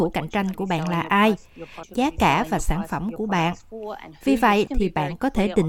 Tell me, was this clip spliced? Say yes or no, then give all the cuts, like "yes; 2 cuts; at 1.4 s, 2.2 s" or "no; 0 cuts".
yes; 2 cuts; at 1.8 s, 4.7 s